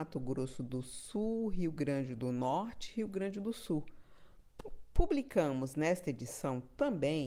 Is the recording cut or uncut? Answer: cut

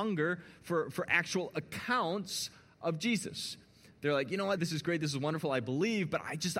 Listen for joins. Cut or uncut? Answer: cut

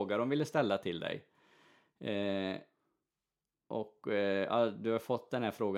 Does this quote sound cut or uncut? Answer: uncut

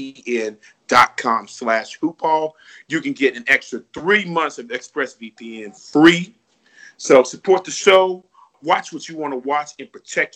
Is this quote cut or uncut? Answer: uncut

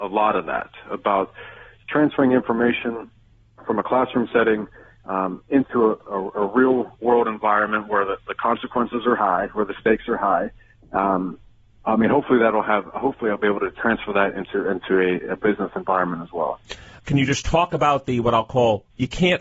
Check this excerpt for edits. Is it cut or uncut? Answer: cut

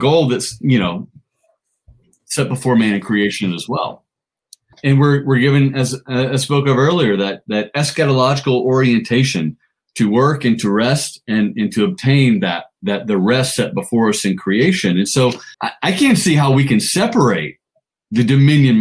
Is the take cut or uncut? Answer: cut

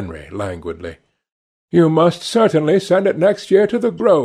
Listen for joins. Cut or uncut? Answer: uncut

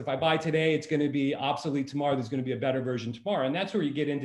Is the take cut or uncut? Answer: uncut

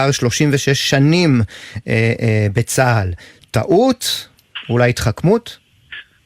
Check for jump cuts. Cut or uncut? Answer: uncut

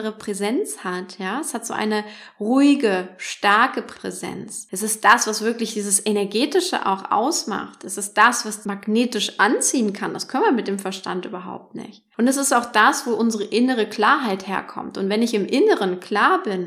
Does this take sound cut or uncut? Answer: uncut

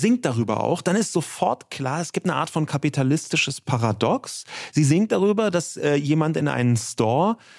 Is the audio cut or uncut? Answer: uncut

